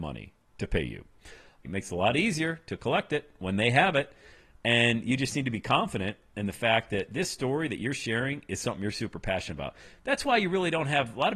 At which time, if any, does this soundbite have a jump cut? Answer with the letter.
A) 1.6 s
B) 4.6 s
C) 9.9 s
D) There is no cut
A